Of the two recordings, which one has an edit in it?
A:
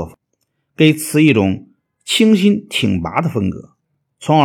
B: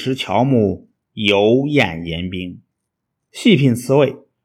B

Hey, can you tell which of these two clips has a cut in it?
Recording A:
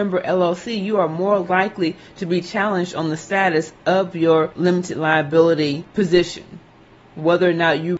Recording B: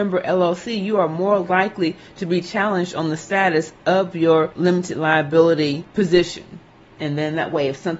B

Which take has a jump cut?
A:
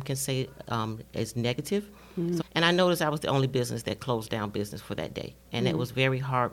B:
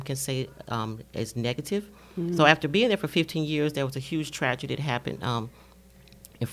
A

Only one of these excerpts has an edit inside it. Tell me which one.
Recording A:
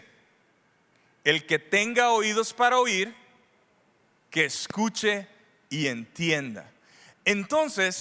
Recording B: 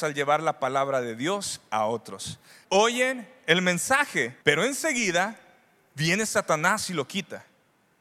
B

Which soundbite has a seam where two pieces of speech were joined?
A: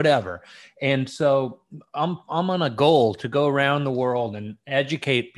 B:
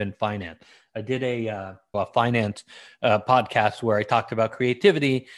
B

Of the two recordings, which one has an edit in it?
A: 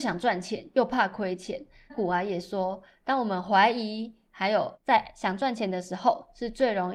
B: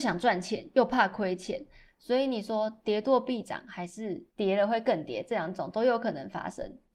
B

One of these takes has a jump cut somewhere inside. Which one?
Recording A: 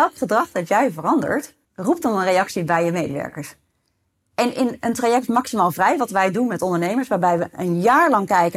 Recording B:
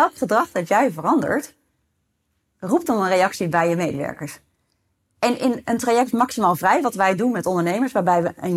A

